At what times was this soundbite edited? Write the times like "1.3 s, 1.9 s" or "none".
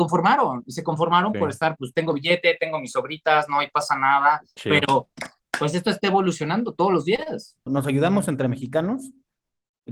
4.6 s, 7.7 s